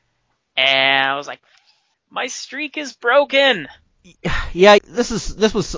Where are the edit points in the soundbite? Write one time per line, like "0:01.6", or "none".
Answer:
0:01.9
0:04.8